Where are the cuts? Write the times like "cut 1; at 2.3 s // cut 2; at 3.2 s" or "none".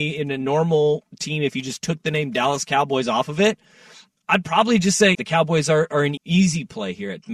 cut 1; at 5.1 s // cut 2; at 6.2 s